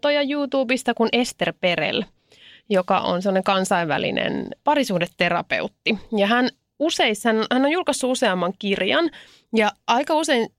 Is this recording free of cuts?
yes; 0 cuts

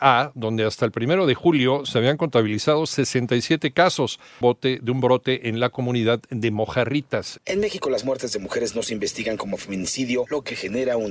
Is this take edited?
yes; 2 cuts; at 4.4 s, 7.4 s

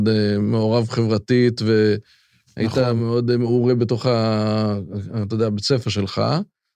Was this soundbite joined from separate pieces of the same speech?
no; 0 cuts

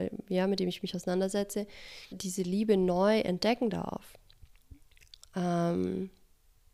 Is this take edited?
yes; 1 cut; at 2.1 s

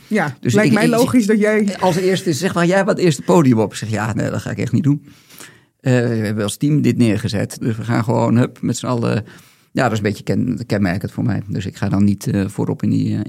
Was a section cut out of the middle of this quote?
yes; 1 cut; at 7.6 s

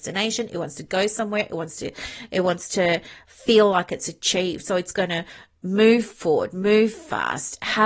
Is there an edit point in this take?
no; 0 cuts

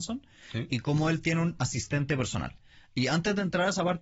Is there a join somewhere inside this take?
no; 0 cuts

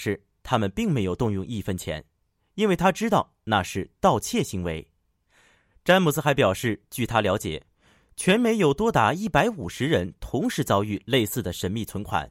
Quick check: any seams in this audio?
no; 0 cuts

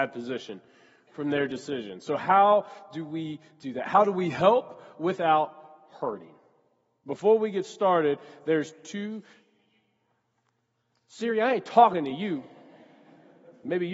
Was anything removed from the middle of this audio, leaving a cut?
no; 0 cuts

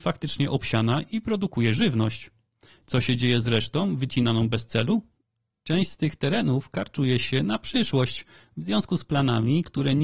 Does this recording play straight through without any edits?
yes; 0 cuts

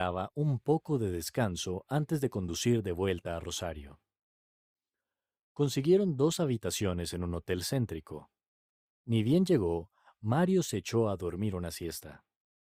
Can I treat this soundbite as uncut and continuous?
yes; 0 cuts

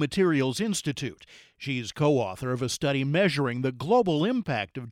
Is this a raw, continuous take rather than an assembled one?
yes; 0 cuts

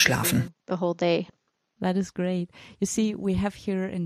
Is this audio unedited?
yes; 0 cuts

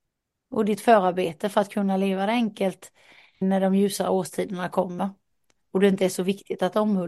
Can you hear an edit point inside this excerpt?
yes; 1 cut; at 3.4 s

